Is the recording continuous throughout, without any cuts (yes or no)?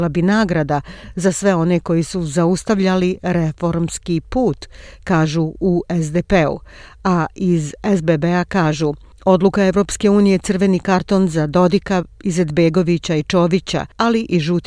yes